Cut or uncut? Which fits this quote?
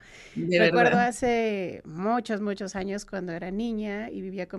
uncut